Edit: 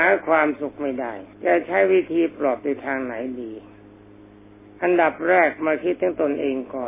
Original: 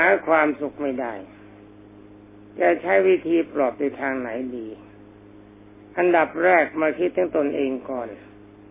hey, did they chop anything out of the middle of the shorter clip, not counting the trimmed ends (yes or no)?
yes